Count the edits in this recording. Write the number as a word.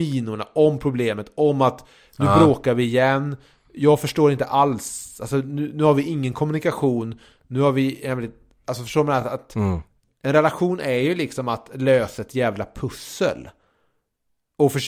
zero